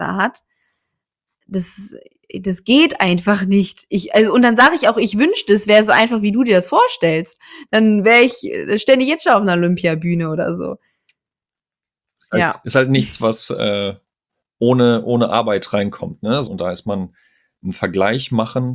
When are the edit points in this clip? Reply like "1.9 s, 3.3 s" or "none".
16.4 s